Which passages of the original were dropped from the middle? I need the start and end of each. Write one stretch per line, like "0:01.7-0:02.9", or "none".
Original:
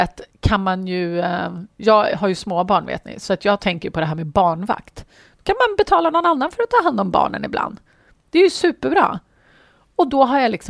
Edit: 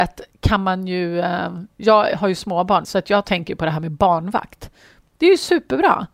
0:02.8-0:03.2
0:05.3-0:08.1